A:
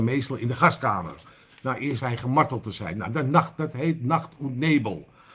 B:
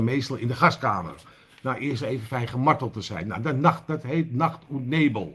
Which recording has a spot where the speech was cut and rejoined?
A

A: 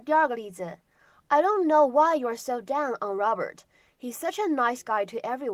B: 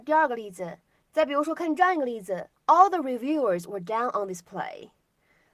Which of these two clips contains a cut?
B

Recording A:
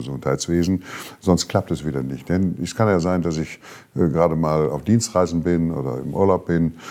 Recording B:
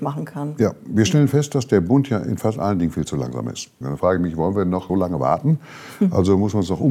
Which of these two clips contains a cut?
B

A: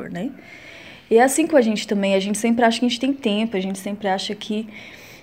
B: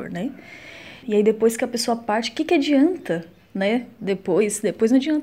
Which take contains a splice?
B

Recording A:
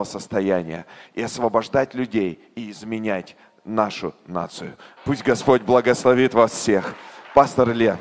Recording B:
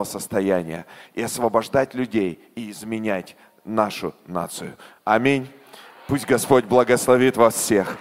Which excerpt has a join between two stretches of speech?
A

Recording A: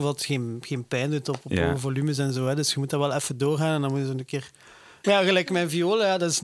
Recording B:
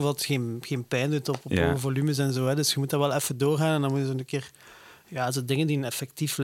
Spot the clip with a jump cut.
A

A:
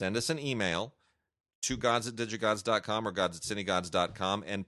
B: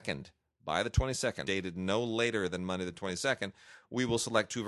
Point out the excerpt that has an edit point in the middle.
B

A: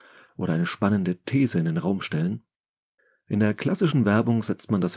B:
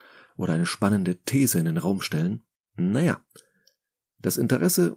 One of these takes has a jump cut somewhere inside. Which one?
B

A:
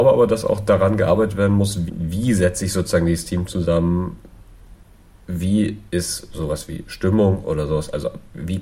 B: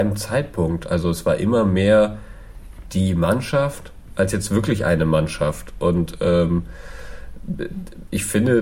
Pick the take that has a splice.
A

